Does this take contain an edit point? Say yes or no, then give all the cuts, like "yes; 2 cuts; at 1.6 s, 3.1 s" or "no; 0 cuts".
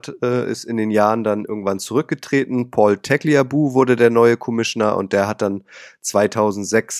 no; 0 cuts